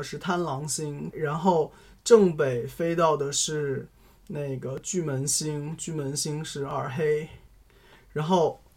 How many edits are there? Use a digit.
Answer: 1